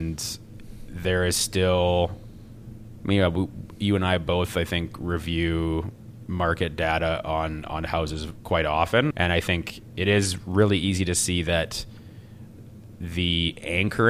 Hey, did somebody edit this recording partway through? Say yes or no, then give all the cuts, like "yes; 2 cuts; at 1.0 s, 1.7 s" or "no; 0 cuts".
yes; 1 cut; at 9.1 s